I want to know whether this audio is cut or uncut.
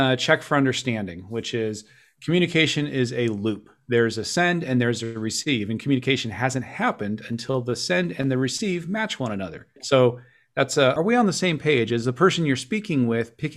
cut